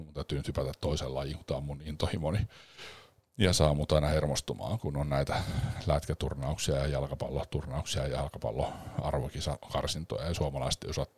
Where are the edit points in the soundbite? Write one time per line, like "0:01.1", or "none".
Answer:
0:04.8